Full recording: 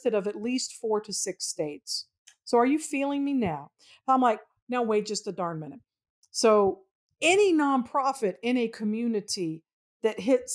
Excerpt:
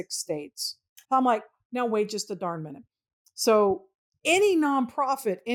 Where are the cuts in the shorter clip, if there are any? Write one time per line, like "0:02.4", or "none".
0:01.0